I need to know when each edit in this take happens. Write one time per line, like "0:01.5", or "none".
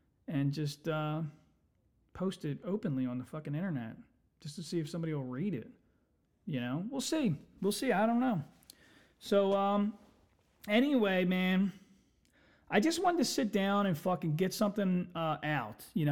none